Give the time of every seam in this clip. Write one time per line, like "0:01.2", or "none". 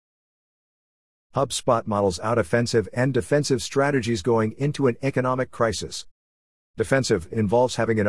0:01.2